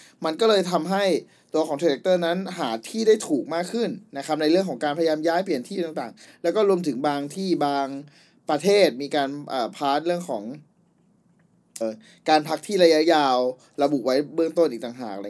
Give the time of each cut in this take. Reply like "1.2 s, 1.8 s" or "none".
11.8 s